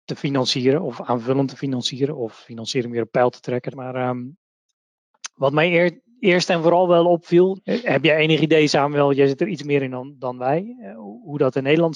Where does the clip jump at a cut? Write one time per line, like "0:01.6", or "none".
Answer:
0:03.7
0:07.6